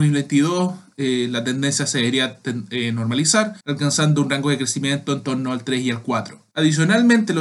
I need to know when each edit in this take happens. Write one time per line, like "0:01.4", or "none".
0:03.6

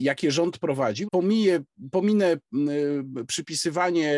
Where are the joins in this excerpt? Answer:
0:01.1

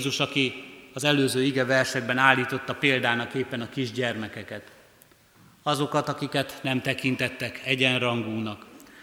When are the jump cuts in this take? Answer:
none

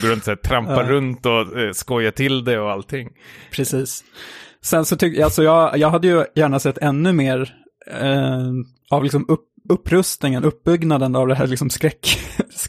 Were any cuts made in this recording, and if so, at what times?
none

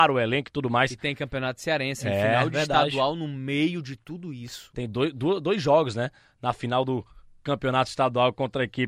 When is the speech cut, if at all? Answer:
none

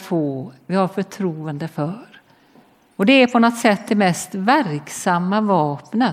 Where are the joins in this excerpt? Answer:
none

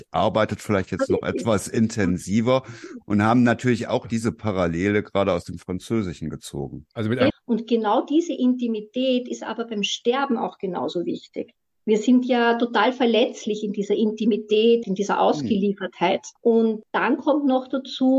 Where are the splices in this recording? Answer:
0:07.3
0:14.8
0:16.4

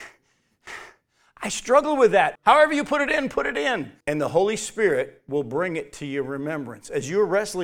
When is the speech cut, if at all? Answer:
0:02.4
0:04.0

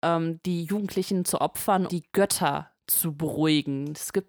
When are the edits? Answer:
0:01.9

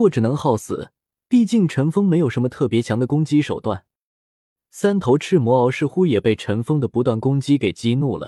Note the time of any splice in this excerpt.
none

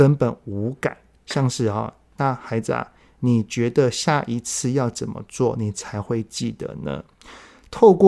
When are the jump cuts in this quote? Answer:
0:02.1

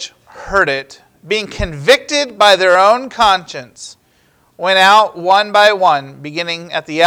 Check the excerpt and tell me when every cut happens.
none

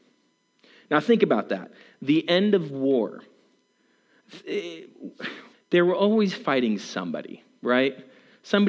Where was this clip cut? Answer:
0:05.5

